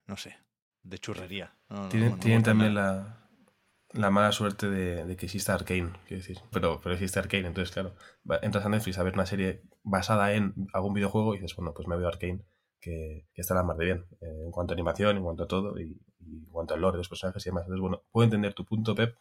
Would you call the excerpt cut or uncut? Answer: cut